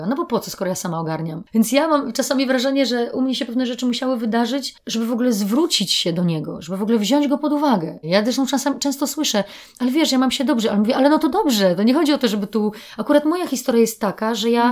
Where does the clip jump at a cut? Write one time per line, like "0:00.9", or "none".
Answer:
0:08.0